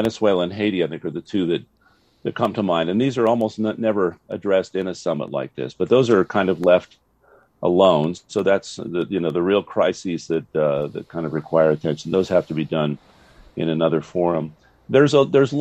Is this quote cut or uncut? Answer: uncut